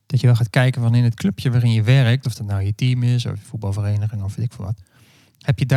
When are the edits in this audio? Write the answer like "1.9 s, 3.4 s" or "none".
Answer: none